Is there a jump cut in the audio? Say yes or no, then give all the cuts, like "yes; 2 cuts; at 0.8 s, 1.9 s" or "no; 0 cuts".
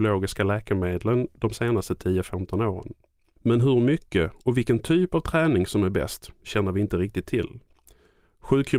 yes; 1 cut; at 3.4 s